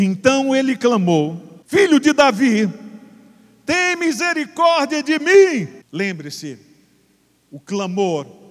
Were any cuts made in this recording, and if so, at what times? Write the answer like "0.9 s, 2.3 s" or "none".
1.6 s, 5.9 s